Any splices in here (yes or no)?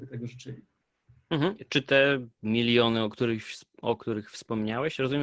no